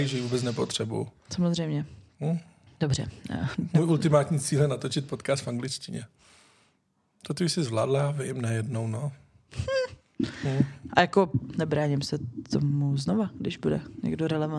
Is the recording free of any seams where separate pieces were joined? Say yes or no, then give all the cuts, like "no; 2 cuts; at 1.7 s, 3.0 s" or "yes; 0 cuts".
yes; 0 cuts